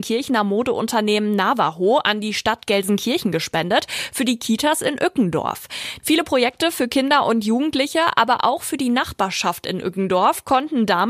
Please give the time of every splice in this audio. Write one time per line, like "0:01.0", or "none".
0:06.0